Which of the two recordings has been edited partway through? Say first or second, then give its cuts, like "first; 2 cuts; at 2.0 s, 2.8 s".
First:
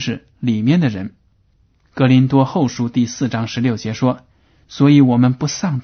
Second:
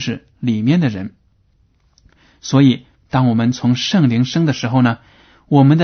first; 1 cut; at 1.8 s